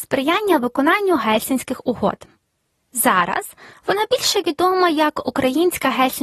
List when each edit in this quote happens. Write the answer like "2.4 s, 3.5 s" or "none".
none